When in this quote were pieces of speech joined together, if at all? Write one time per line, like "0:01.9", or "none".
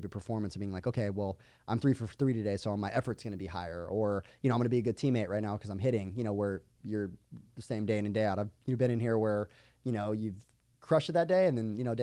none